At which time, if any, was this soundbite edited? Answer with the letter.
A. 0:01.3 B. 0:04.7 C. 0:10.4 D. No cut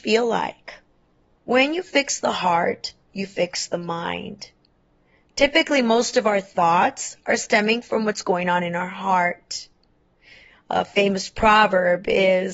A